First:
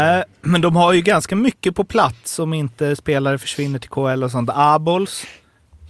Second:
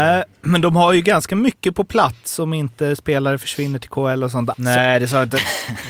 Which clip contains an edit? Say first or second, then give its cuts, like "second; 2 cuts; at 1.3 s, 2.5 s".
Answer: second; 1 cut; at 4.5 s